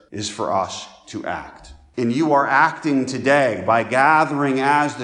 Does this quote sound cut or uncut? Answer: uncut